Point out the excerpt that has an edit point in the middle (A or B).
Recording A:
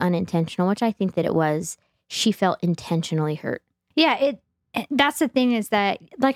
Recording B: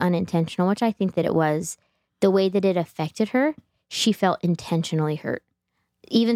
A